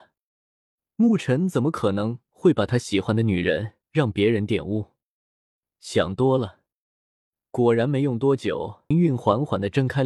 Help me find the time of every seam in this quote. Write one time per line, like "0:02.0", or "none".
0:08.9